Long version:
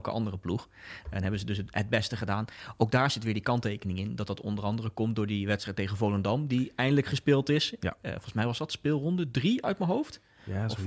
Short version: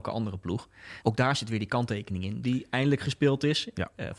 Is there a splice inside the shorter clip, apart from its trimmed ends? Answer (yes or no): yes